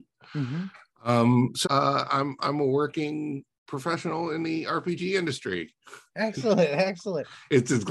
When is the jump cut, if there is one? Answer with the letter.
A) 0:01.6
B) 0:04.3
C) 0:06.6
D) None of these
A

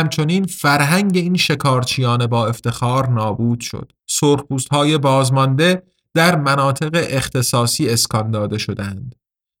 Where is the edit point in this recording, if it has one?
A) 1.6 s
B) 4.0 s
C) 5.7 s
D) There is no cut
B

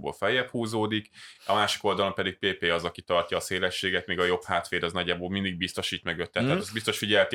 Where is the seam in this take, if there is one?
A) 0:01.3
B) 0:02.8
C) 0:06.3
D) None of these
D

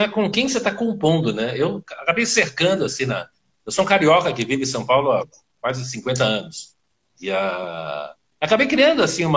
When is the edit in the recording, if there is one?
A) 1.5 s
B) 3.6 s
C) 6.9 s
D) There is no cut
D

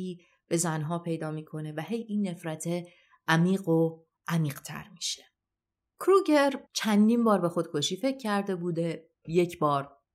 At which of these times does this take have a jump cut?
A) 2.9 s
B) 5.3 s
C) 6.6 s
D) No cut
C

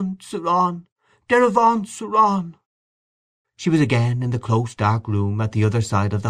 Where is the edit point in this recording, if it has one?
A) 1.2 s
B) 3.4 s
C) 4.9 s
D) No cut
B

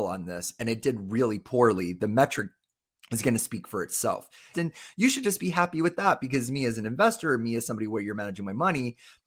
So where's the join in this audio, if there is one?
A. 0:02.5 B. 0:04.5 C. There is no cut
B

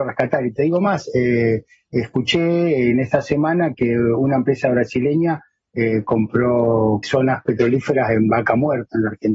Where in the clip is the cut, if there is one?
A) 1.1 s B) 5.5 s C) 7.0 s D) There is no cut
C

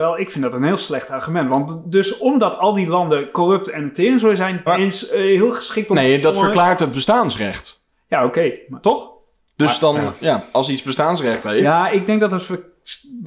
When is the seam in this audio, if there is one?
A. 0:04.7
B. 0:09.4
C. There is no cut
A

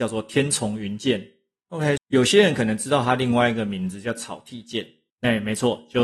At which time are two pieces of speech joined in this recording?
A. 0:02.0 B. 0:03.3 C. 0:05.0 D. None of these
A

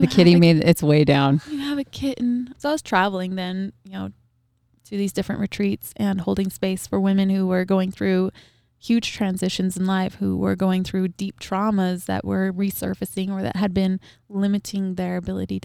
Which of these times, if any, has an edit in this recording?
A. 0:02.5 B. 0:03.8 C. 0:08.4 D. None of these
A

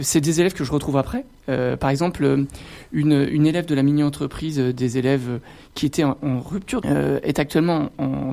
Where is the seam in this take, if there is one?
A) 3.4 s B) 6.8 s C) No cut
B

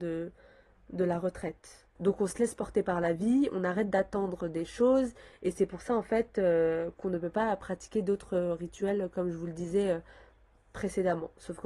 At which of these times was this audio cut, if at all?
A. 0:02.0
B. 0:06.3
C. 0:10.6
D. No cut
A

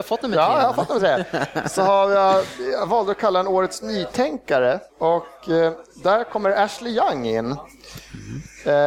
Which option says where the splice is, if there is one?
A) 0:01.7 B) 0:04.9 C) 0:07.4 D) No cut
B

